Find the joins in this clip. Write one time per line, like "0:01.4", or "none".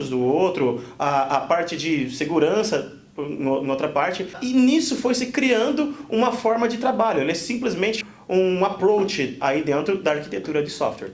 0:08.0